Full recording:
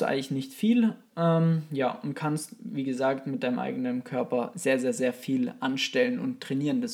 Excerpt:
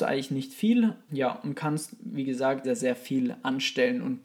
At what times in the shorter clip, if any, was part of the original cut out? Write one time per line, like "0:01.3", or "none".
0:01.1
0:02.6